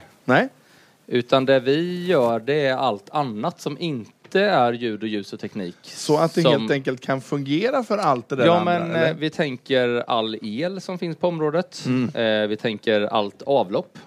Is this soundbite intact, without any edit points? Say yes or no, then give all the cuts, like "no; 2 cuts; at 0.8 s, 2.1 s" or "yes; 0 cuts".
yes; 0 cuts